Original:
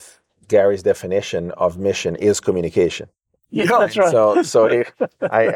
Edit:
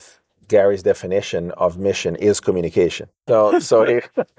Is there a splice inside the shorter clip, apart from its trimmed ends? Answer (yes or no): yes